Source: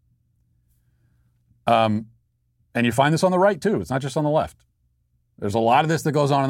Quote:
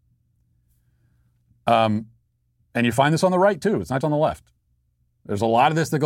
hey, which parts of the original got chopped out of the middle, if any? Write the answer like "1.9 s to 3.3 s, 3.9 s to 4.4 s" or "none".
4.0 s to 4.1 s